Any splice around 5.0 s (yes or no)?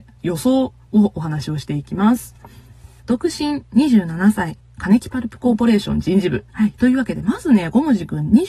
no